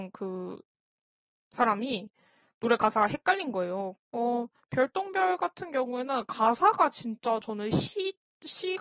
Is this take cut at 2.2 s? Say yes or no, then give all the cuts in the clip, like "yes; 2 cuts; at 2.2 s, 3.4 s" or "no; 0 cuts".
no; 1 cut; at 4.0 s